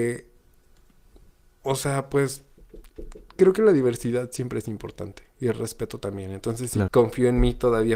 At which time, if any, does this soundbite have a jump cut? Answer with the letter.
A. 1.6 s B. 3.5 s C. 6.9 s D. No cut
C